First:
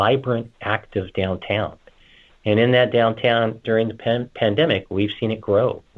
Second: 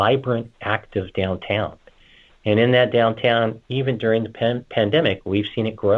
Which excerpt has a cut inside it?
first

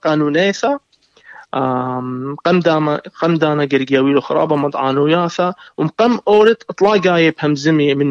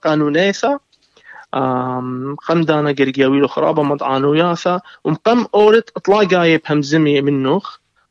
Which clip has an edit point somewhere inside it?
second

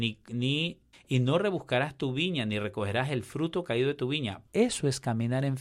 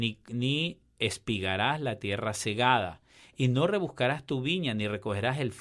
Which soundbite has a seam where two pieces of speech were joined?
first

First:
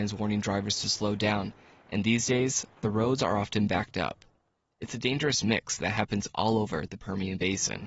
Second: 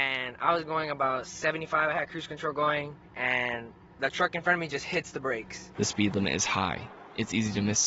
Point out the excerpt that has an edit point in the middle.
second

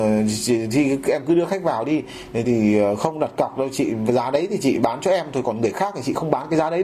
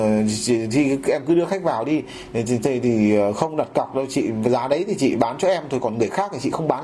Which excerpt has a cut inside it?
first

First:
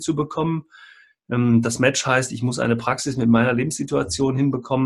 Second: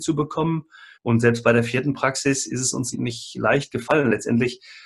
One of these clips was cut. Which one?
second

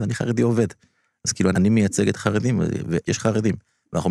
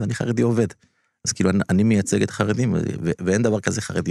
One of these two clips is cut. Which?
first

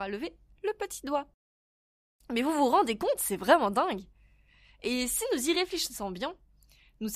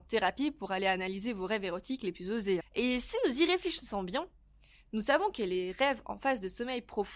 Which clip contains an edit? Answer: second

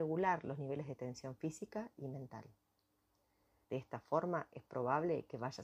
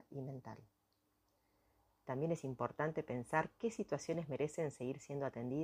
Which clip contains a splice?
first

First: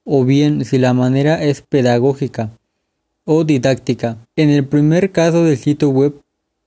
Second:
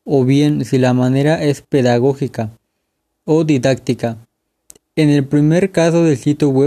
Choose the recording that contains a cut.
first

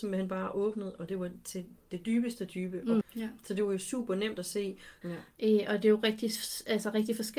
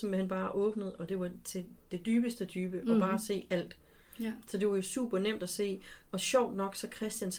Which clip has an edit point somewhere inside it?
first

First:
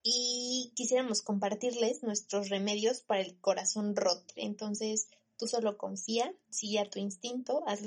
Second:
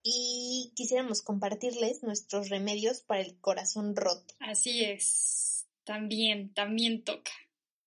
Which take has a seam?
first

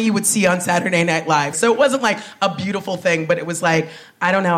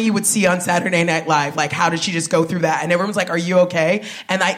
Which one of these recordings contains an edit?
first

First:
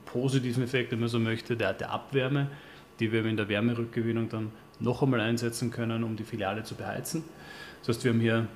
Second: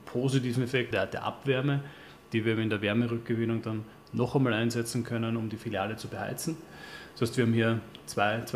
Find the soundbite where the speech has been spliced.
second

